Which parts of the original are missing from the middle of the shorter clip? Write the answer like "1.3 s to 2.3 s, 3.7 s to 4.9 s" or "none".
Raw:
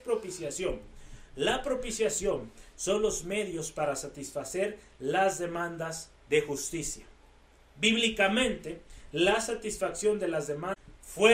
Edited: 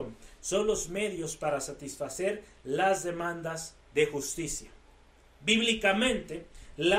none

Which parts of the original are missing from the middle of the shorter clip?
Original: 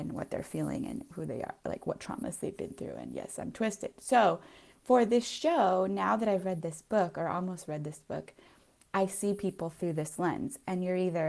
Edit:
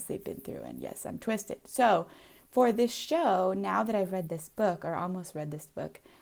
none

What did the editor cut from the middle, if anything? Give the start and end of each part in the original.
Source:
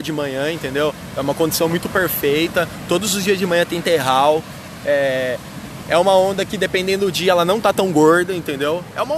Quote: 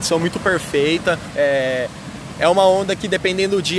2.8 s to 4.8 s

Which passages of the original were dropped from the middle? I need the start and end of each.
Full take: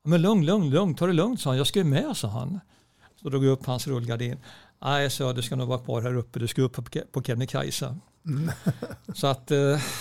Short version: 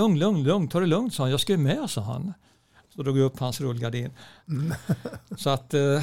4.7 s to 8.2 s

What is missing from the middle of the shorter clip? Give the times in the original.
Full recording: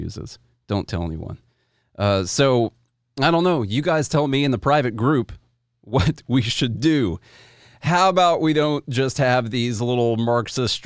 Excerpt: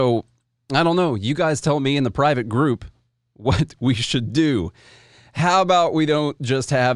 none

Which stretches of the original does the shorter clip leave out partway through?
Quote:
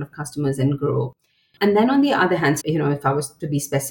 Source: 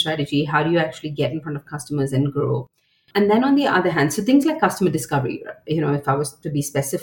4.1 s to 5.6 s

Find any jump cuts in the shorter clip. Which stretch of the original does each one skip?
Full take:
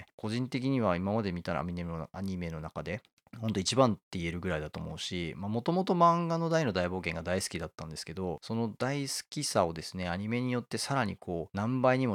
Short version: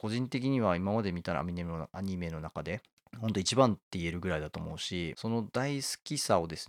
5.3 s to 8.4 s

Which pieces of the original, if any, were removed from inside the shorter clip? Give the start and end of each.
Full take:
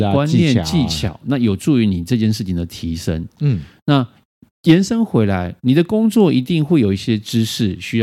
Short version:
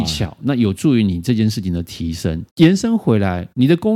3.3 s to 4.5 s

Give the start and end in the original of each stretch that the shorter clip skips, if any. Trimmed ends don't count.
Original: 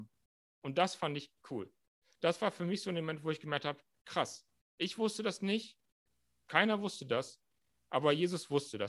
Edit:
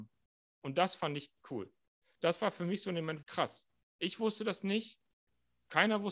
3.2 s to 4.0 s

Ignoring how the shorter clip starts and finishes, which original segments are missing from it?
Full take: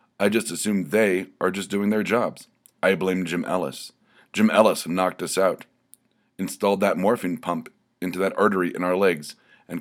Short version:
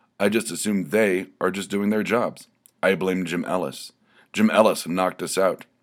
none

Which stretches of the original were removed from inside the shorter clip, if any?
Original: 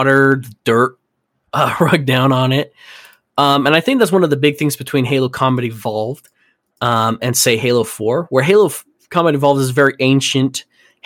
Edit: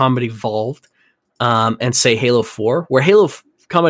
none

